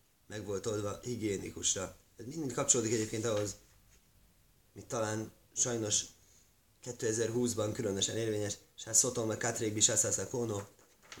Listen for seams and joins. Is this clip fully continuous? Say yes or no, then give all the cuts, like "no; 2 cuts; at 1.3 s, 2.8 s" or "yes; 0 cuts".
yes; 0 cuts